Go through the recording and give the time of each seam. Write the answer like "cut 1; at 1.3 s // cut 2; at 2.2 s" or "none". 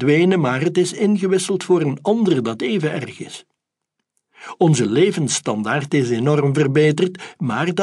none